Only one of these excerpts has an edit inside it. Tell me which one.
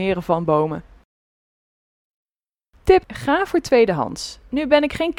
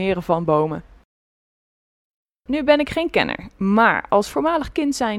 second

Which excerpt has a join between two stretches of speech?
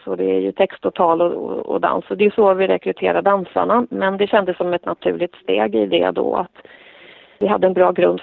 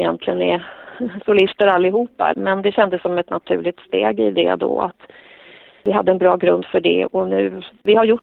second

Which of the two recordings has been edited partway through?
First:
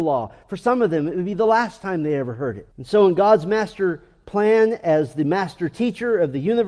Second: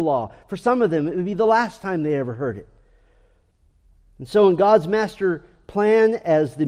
first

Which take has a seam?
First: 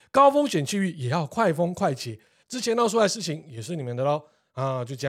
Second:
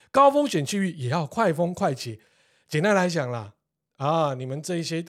first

